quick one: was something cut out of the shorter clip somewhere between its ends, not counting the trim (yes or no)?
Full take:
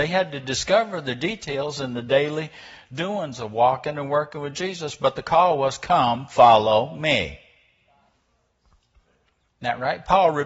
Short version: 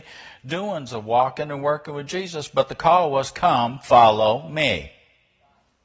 no